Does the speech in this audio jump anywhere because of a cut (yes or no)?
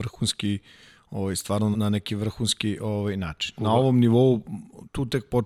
yes